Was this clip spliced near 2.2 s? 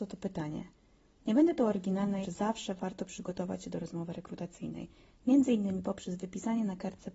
yes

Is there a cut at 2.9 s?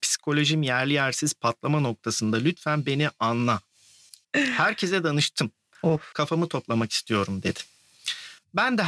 no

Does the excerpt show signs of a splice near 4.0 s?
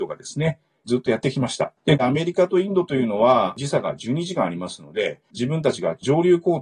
no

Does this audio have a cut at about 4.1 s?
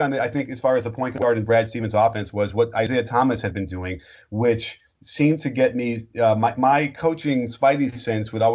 no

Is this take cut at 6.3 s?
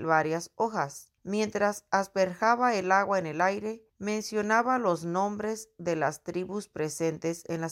no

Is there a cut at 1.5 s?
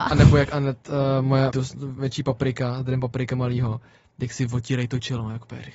yes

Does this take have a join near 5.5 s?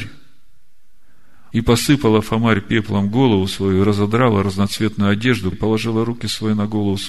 yes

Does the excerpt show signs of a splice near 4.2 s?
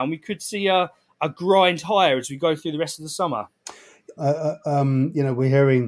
yes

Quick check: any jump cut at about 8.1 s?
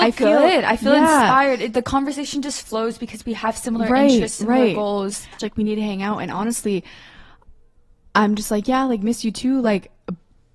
no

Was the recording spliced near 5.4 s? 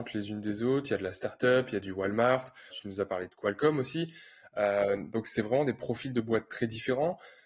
no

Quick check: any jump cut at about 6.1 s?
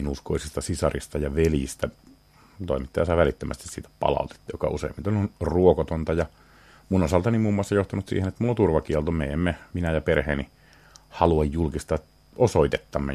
no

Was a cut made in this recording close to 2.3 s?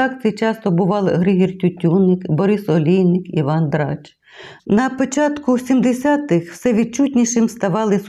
no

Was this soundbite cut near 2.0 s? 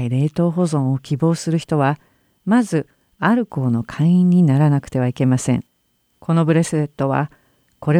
no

